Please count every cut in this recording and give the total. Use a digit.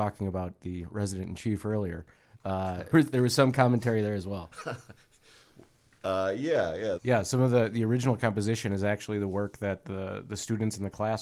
2